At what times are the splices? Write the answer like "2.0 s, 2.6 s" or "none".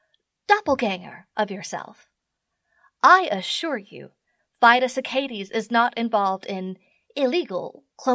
none